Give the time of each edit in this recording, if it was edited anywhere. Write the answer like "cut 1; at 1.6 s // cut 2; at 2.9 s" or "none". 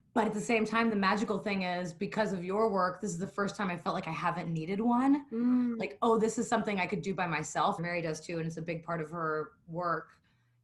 cut 1; at 7.8 s